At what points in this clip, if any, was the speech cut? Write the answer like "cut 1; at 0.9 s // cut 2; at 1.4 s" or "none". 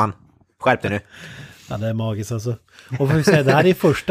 none